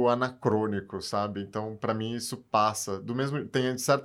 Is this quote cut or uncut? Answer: uncut